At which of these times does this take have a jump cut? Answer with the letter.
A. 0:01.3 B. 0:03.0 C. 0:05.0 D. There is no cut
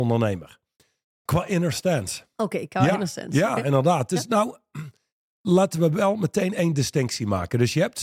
A